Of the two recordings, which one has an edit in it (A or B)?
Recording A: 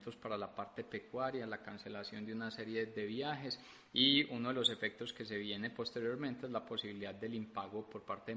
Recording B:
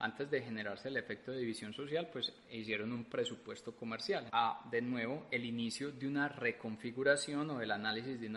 B